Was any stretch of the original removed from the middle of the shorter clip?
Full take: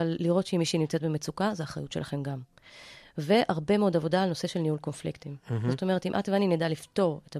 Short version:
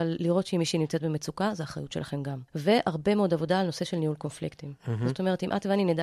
yes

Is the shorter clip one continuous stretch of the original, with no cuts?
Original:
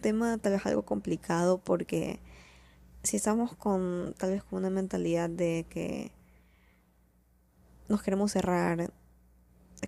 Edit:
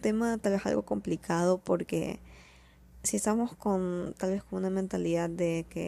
yes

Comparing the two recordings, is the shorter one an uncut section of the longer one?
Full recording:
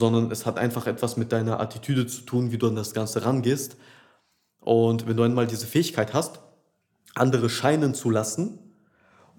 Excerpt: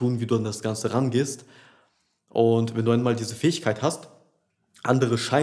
yes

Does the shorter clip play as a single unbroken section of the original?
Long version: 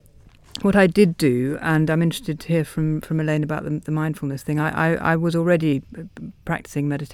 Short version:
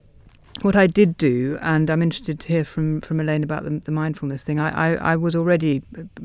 yes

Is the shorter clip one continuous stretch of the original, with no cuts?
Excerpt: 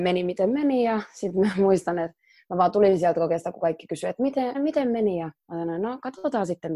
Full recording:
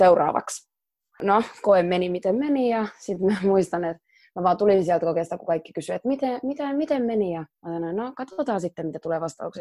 no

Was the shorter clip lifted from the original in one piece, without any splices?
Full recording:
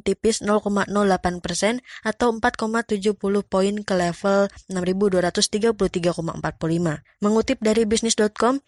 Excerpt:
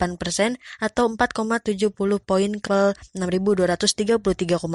no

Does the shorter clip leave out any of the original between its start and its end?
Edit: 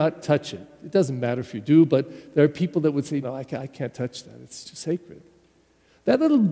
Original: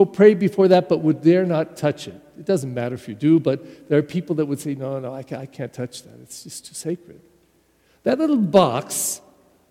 yes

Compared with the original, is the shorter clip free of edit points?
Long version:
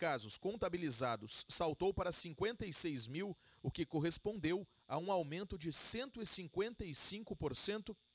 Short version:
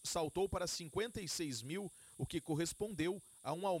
yes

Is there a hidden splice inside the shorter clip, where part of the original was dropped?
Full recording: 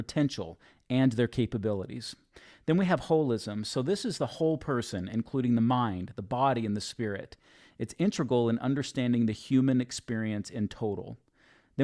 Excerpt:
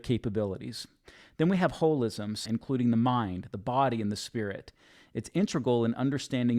yes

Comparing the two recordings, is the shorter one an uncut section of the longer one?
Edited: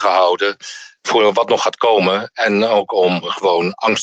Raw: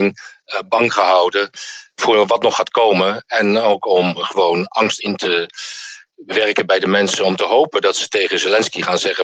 yes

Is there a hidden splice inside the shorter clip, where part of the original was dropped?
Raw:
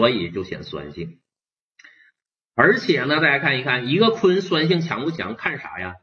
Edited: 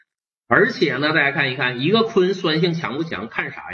no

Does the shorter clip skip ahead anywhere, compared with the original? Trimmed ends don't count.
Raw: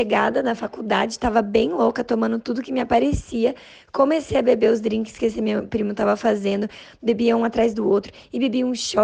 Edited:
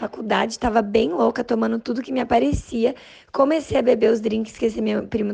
no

